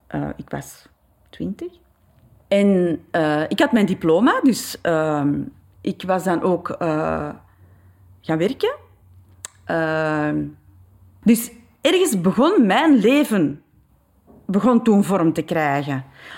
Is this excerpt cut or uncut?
uncut